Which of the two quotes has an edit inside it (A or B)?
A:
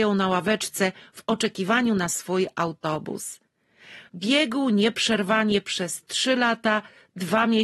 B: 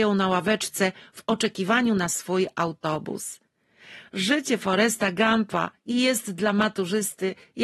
A